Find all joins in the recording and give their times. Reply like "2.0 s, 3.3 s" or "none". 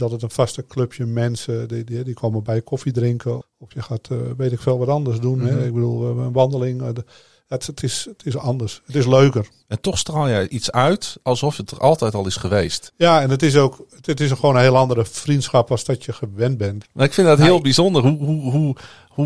3.4 s, 12.9 s, 16.8 s